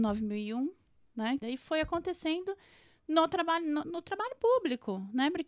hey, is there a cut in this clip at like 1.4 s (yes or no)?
yes